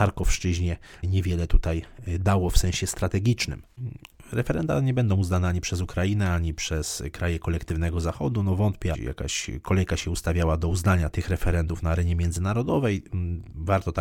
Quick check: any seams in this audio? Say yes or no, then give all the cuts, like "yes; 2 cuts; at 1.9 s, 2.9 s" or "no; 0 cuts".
yes; 3 cuts; at 1.0 s, 8.9 s, 11.1 s